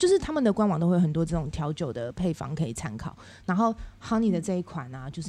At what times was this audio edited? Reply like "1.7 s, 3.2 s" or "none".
none